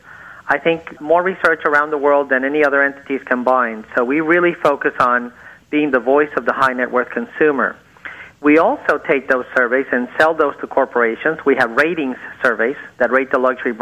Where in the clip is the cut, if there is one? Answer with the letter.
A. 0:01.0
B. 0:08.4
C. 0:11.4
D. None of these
A